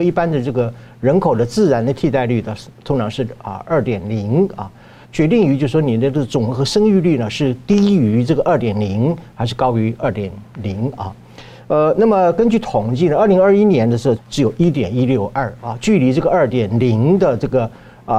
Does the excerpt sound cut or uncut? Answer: cut